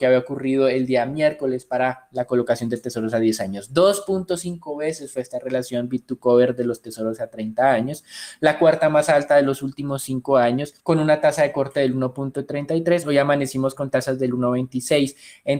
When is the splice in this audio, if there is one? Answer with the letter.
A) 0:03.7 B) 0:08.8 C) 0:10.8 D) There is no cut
C